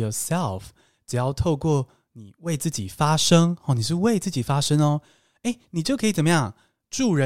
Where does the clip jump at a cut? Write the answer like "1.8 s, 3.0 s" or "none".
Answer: none